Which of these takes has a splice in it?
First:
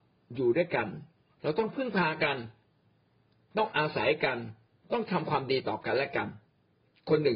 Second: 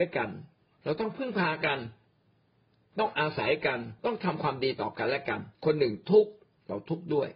second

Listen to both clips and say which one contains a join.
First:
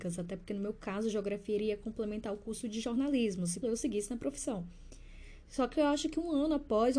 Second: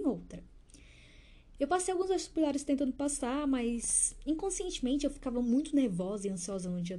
first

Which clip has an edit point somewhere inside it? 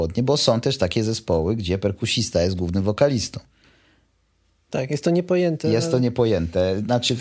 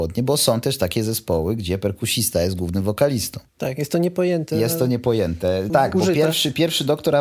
second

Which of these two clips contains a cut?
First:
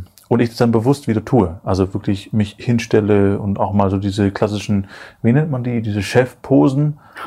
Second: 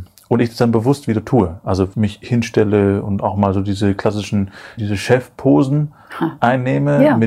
second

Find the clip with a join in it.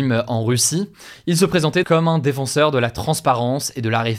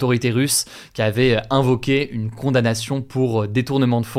first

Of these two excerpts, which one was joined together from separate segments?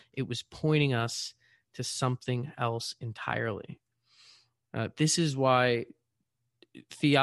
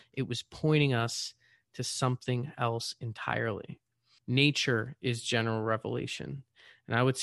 second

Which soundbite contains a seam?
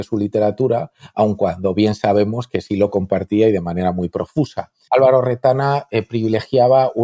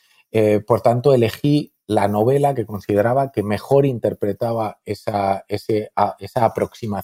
first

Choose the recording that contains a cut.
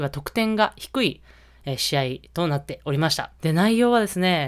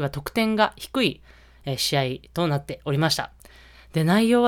first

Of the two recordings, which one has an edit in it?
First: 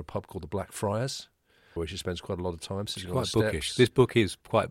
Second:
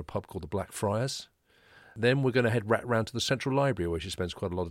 first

